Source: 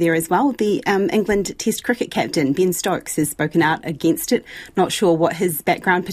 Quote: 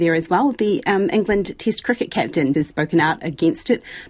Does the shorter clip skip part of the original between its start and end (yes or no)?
yes